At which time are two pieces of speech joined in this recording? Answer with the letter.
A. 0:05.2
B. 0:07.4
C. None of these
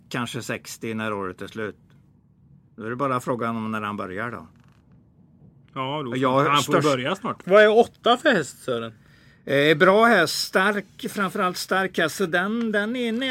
B